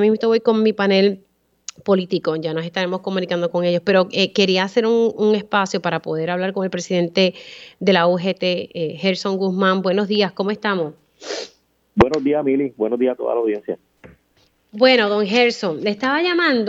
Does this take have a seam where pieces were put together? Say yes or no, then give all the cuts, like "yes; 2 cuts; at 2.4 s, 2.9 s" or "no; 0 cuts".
no; 0 cuts